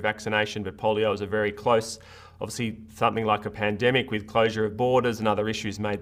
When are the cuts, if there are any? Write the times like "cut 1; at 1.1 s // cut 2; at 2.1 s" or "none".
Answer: none